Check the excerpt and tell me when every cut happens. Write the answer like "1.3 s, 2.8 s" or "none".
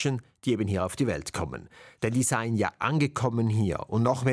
none